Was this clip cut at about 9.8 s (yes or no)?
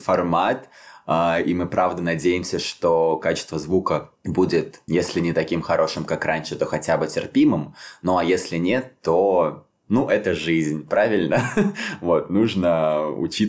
no